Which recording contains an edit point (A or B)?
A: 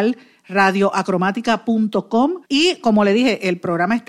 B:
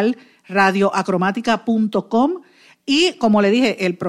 A